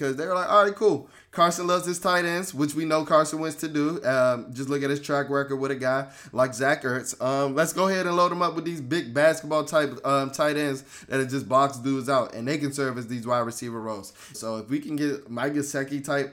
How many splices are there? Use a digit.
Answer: 1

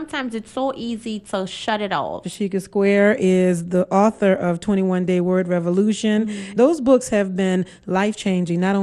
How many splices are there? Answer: 2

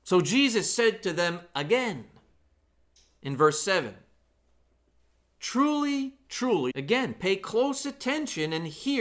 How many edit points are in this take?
1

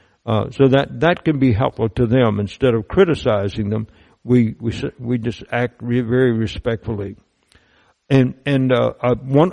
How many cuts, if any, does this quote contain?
0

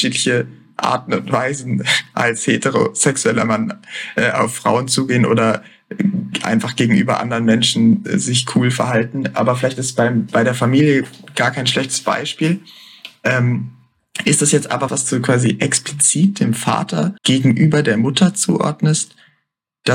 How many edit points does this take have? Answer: 2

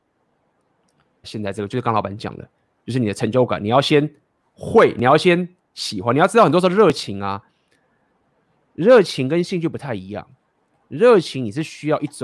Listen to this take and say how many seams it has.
1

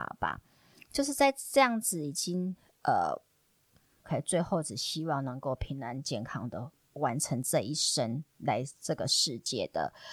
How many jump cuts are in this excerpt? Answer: 1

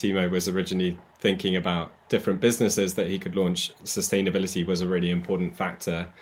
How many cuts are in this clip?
0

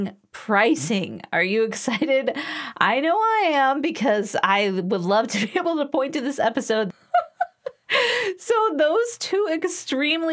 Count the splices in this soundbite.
1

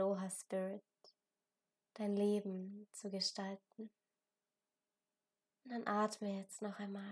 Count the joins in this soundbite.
0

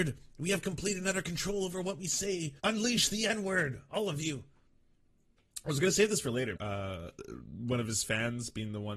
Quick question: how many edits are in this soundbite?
2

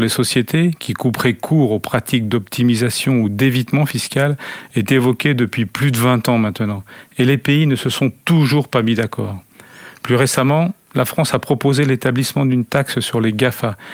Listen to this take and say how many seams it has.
0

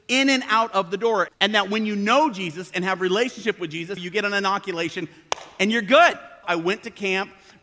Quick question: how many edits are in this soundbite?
3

